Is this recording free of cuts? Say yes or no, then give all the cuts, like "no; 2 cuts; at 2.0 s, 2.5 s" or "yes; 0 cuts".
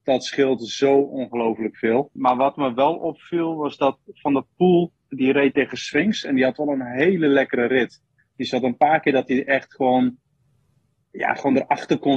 no; 1 cut; at 2.2 s